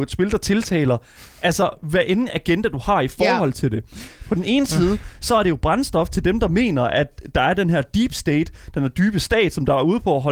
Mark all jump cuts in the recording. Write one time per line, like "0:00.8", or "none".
none